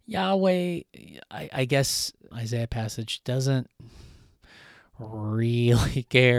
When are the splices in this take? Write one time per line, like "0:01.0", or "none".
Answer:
0:02.3